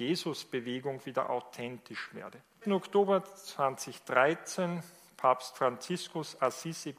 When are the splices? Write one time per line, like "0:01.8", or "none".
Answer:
0:02.6